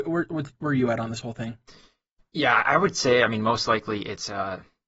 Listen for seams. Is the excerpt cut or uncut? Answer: uncut